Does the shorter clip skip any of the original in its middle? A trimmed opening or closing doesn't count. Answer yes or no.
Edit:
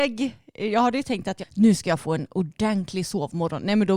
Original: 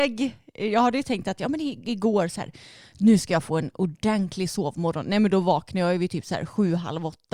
yes